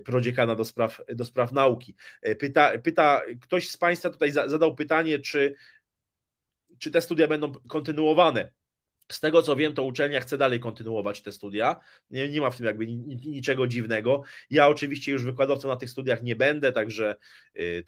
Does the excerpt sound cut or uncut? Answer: uncut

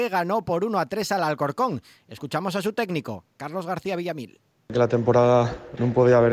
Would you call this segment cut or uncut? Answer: uncut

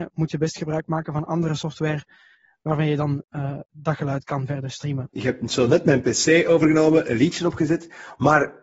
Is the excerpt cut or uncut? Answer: uncut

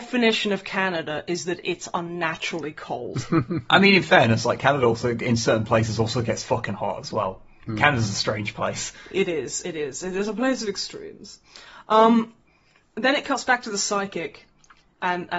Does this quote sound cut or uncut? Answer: uncut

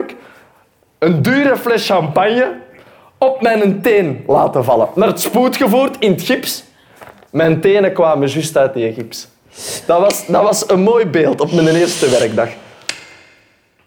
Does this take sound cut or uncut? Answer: uncut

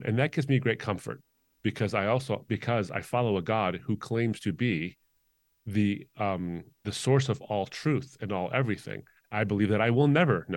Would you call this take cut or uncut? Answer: cut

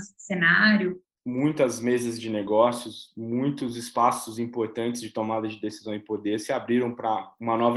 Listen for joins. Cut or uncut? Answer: cut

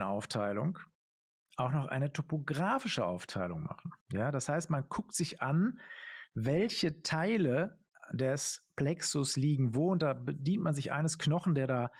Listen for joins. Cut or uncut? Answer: cut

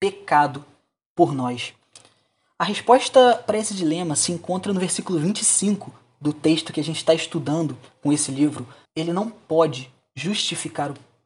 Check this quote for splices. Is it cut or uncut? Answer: cut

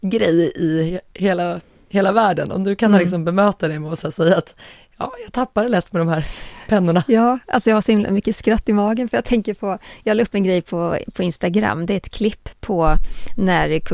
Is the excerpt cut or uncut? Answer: uncut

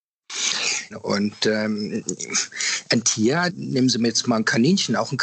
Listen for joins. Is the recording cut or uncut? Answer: cut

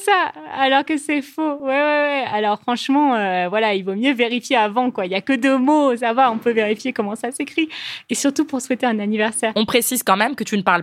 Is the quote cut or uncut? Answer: uncut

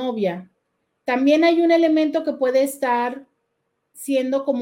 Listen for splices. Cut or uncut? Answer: uncut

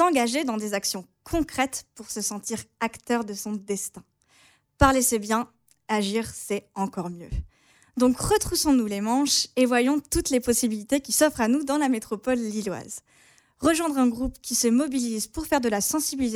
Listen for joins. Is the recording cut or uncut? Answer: uncut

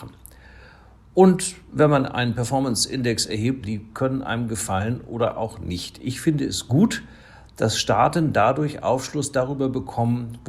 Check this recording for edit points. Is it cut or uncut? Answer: cut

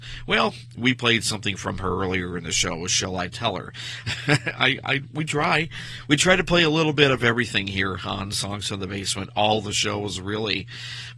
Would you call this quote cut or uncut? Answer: cut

